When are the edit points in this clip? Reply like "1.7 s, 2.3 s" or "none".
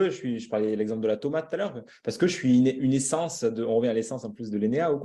none